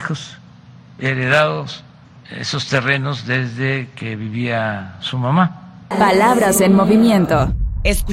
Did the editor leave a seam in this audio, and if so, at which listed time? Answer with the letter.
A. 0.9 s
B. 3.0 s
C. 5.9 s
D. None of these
C